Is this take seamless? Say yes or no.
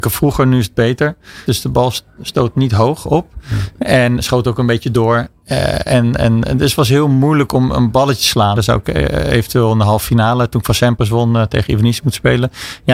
no